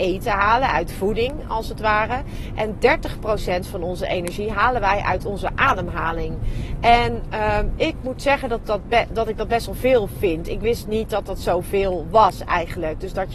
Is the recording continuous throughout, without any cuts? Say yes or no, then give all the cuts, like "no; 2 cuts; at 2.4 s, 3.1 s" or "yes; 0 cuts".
yes; 0 cuts